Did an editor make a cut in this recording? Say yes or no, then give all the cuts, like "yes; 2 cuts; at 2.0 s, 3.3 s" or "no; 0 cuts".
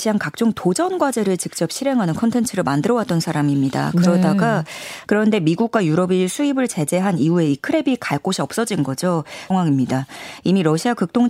yes; 2 cuts; at 5.1 s, 9.5 s